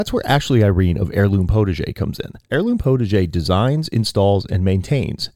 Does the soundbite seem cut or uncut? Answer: uncut